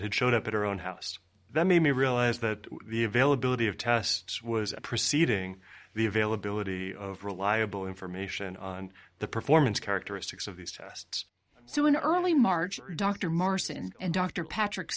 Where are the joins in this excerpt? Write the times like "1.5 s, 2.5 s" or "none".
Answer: 4.8 s